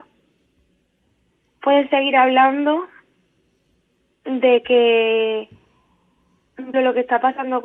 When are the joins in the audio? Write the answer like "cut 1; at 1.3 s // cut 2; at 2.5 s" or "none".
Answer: cut 1; at 6.7 s

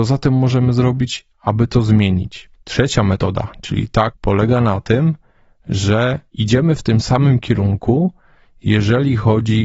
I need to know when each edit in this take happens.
cut 1; at 4.1 s

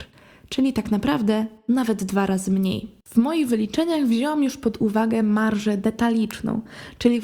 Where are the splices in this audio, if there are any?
cut 1; at 3.0 s

